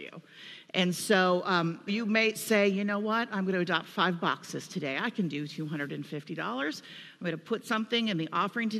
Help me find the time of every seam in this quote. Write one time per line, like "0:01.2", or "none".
0:01.9